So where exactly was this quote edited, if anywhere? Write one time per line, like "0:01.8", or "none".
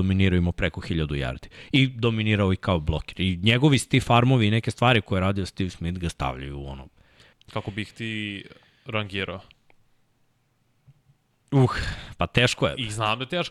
0:07.3